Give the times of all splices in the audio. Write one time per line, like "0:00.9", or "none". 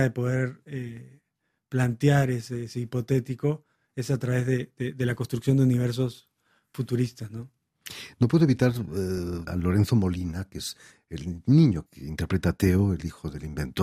0:09.5
0:11.9